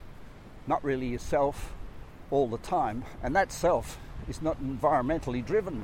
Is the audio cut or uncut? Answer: cut